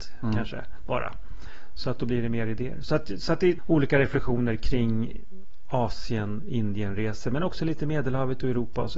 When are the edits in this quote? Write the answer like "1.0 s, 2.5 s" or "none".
3.6 s